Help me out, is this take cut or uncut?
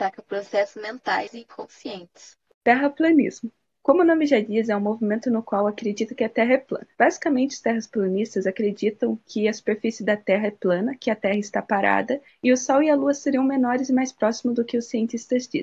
uncut